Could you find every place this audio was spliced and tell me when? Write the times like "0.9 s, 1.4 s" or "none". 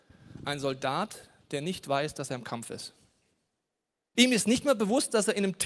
4.1 s